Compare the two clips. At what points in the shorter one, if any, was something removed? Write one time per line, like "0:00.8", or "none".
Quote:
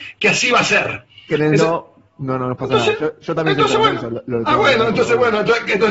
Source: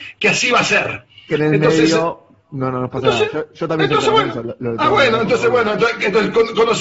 0:01.6